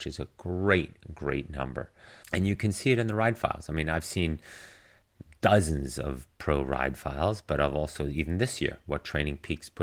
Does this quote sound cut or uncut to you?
cut